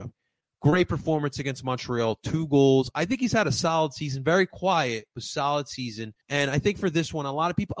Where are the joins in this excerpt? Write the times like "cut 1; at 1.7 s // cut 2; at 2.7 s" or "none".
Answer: cut 1; at 6.2 s